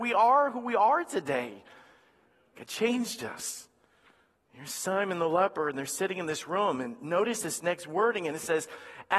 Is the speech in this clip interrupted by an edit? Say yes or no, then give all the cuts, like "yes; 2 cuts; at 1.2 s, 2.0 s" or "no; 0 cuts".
no; 0 cuts